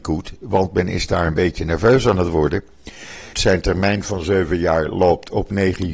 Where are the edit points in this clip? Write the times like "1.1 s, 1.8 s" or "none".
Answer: 3.3 s